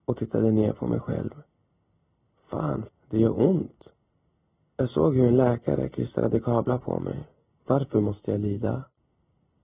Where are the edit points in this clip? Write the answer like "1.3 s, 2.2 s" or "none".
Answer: 2.9 s, 7.5 s